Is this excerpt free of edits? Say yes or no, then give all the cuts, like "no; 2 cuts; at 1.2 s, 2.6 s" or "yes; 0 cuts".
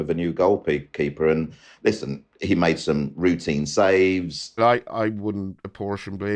no; 1 cut; at 4.6 s